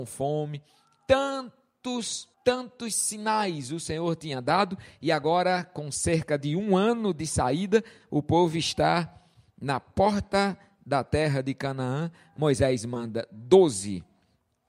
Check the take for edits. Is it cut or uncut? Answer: cut